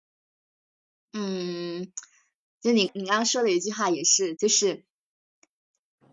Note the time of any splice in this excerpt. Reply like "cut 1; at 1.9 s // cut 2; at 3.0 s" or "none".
cut 1; at 2.9 s // cut 2; at 4.4 s